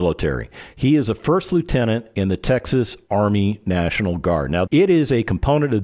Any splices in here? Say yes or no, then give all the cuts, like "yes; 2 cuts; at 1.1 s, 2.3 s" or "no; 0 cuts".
yes; 1 cut; at 4.7 s